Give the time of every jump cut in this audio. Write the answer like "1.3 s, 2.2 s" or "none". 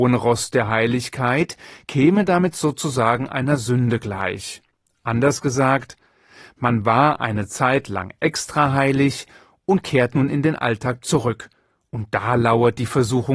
none